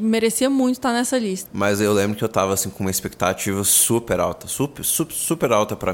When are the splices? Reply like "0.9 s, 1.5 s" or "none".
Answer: 1.5 s